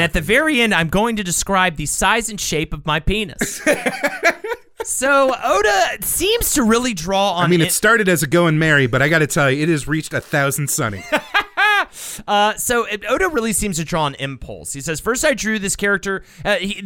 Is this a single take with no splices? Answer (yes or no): yes